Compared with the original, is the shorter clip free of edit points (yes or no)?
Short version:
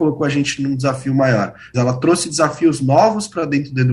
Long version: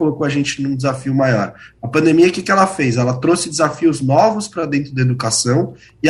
no